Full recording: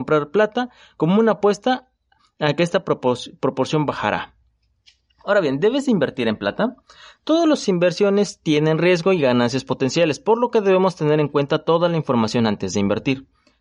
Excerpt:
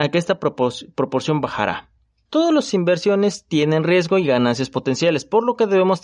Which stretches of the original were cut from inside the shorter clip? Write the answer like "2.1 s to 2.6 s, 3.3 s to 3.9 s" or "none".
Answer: 4.7 s to 7.2 s